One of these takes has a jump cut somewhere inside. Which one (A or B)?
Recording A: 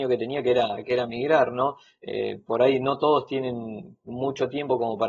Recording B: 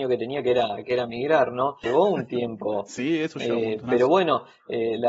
B